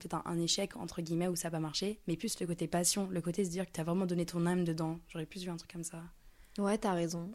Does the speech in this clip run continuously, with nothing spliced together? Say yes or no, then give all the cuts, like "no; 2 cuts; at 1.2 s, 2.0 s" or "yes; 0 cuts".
yes; 0 cuts